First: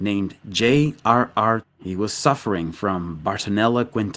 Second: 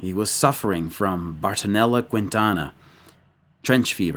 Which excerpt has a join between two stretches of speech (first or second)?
first